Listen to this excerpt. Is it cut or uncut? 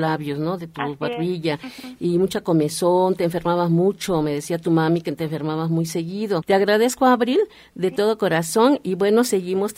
cut